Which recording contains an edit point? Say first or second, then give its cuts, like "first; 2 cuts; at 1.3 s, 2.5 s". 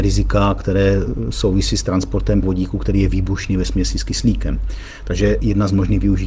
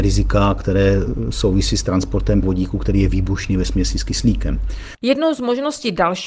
second; 1 cut; at 4.9 s